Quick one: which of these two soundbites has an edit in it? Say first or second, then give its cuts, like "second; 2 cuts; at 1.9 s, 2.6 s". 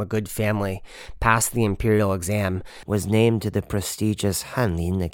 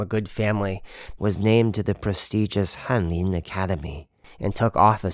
second; 1 cut; at 1.2 s